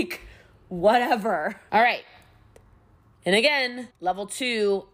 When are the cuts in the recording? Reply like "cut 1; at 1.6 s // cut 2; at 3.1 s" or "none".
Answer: cut 1; at 1.7 s // cut 2; at 3.9 s